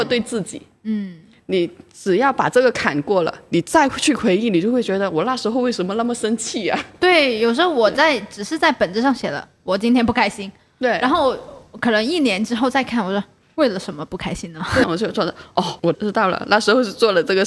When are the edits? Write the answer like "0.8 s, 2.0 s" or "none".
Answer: 14.8 s, 15.9 s